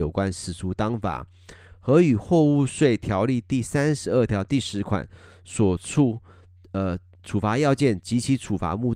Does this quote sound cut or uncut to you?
uncut